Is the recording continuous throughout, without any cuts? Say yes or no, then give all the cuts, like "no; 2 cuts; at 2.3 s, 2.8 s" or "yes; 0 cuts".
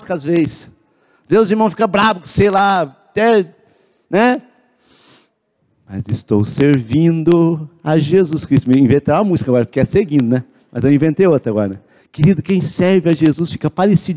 no; 1 cut; at 12.0 s